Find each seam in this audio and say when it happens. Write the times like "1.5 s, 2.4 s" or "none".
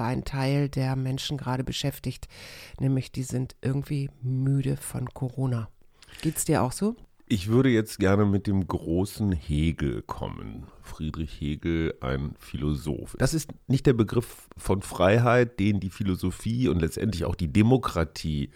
13.2 s